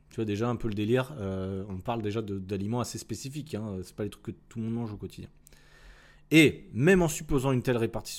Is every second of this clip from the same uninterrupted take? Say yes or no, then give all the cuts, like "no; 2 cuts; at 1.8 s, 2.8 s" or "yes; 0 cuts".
yes; 0 cuts